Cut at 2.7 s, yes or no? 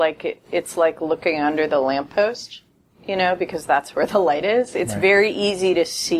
no